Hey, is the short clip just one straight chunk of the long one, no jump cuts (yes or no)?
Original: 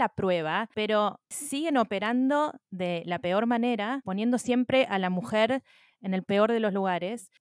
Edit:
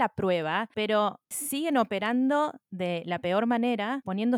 yes